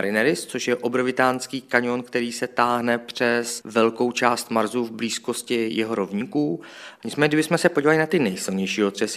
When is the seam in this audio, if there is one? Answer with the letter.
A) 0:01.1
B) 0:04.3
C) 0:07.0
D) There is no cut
C